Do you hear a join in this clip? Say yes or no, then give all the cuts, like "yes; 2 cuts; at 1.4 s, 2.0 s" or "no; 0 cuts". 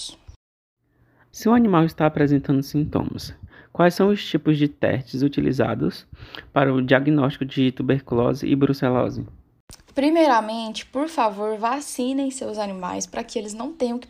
yes; 1 cut; at 1.3 s